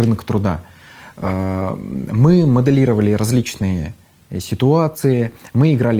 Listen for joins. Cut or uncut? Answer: uncut